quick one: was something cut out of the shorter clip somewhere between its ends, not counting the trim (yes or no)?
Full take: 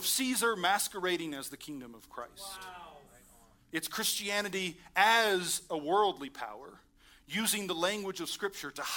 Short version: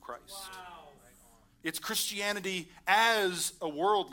no